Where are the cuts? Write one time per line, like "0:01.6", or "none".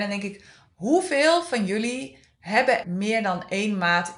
0:02.8

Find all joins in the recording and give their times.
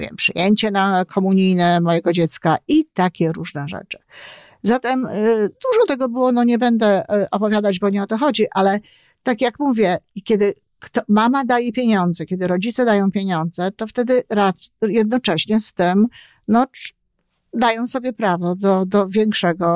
none

